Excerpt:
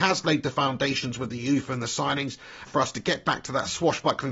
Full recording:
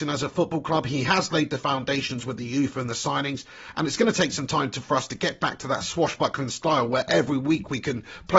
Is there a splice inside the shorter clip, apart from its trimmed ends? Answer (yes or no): yes